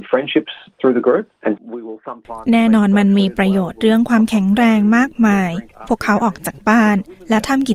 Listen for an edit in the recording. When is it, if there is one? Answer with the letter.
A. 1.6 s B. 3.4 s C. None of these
A